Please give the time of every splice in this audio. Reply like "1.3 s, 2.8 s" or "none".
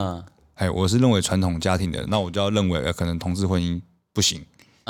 none